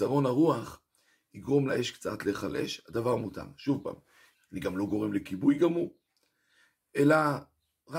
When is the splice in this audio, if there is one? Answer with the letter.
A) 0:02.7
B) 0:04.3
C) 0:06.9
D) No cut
B